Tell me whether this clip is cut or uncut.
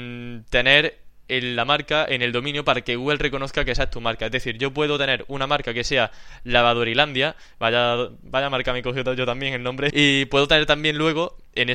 cut